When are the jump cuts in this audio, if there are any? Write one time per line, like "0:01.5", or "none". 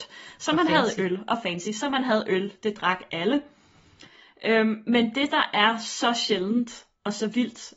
none

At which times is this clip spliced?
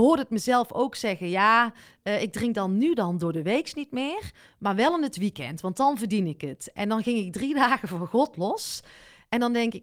none

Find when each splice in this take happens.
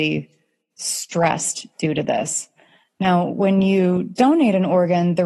none

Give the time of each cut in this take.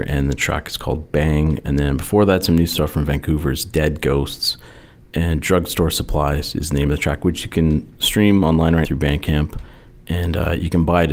0:08.8

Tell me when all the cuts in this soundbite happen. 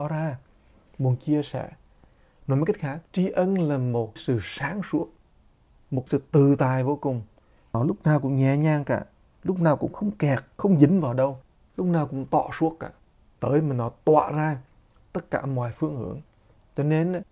0:03.0
0:10.5

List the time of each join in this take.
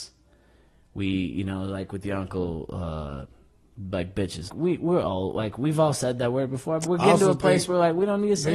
0:04.5
0:06.9

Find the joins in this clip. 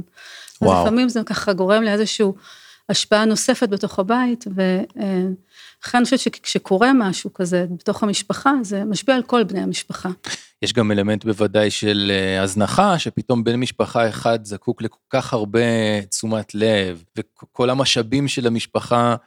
0:17.1

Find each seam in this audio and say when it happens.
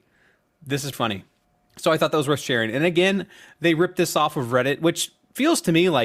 0:00.9

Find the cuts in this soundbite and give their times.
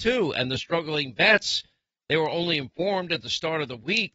none

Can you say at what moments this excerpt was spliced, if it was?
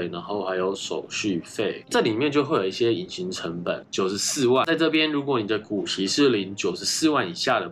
0:03.8

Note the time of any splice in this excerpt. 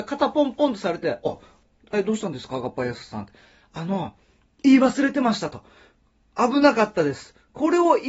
0:01.2

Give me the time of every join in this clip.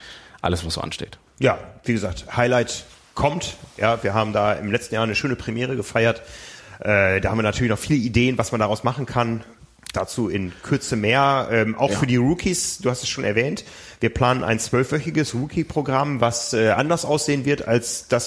none

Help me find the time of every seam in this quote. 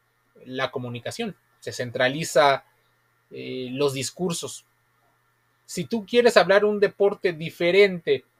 none

